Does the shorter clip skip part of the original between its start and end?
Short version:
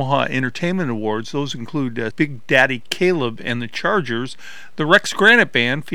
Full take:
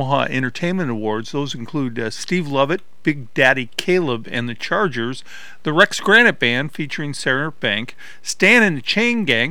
yes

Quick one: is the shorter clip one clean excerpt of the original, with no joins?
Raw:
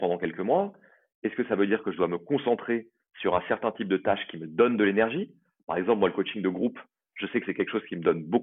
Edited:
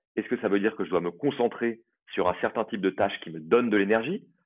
yes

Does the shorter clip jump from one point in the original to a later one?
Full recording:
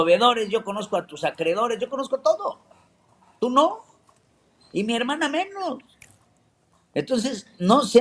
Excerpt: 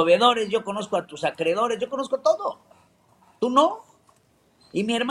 no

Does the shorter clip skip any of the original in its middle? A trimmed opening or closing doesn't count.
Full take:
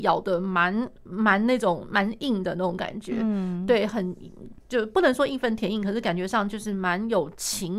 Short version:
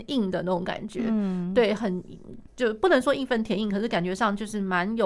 no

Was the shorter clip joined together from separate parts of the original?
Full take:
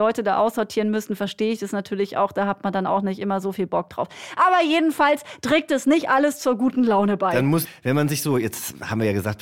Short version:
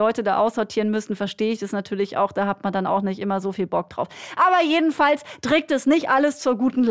no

